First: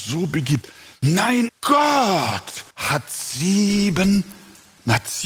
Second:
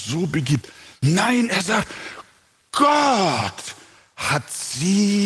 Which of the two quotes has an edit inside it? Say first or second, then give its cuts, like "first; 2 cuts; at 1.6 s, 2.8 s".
first; 2 cuts; at 1.5 s, 2.7 s